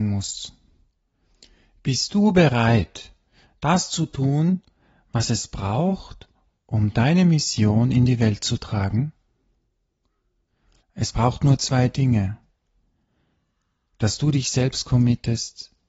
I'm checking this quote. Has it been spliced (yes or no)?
yes